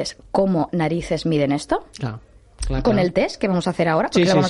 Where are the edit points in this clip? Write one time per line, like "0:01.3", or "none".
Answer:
none